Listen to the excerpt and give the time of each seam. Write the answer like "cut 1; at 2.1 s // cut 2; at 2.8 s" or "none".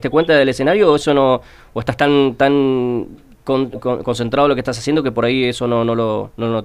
none